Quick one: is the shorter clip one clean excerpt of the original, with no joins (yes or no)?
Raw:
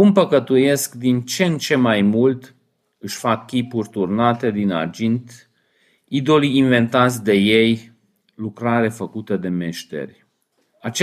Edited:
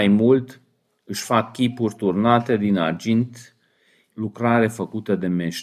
no